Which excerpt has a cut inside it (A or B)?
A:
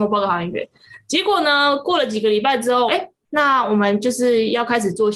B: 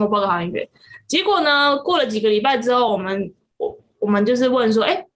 A